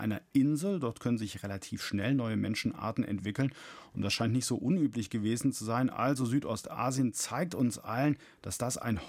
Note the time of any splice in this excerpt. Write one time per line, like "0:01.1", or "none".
none

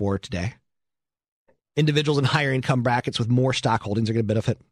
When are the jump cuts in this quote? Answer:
none

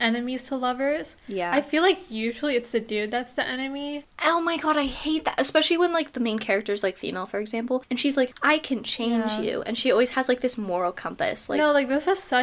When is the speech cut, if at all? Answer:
none

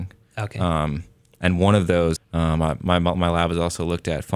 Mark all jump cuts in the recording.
0:02.2

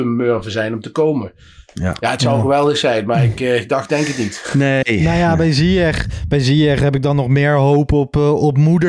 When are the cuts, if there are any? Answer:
none

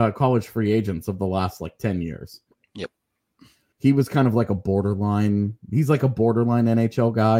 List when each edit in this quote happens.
0:03.7

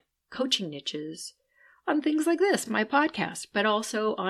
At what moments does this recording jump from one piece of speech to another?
none

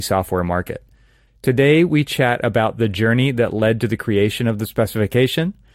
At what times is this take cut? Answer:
0:01.3

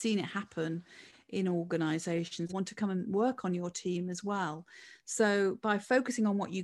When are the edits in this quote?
0:02.5

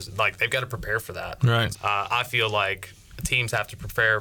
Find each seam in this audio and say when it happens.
0:01.7

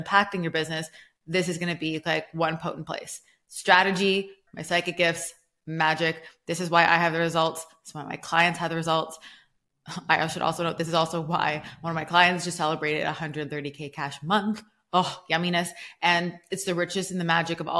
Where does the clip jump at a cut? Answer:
0:04.5

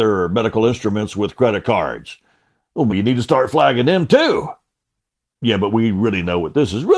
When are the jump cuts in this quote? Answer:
0:02.9

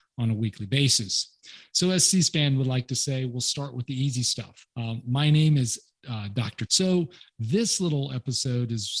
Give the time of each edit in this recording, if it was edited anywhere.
0:04.7
0:06.7

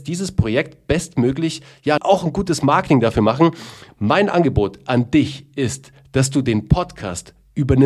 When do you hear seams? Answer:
0:02.0
0:03.9

